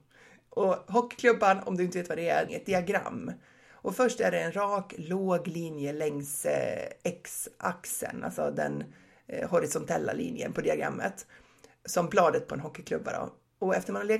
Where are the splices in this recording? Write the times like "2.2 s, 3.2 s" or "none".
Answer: 2.5 s